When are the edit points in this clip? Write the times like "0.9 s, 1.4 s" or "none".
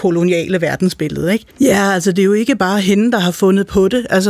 1.5 s